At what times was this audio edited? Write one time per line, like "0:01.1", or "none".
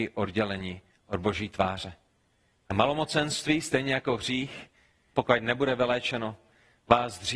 0:02.6
0:05.1